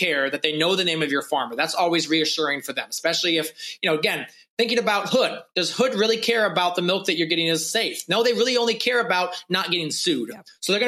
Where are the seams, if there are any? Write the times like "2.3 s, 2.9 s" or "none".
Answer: none

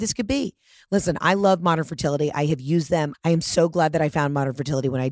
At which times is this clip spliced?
3.1 s

